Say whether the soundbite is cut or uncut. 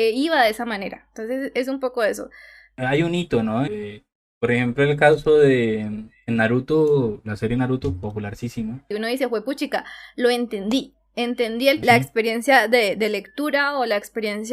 cut